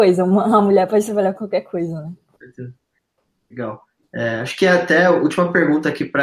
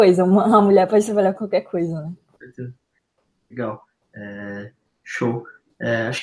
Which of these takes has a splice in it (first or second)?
first